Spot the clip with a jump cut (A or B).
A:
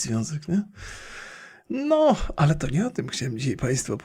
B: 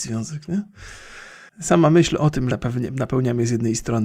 B